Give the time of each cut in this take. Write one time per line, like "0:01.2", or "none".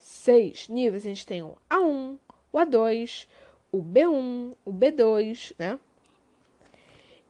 0:05.6